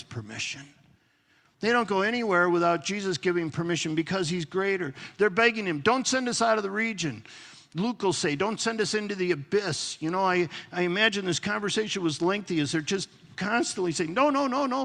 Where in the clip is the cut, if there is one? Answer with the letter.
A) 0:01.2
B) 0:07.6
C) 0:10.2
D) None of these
D